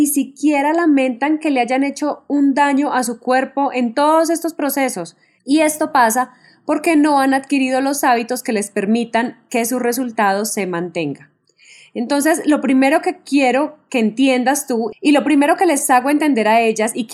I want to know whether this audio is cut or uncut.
cut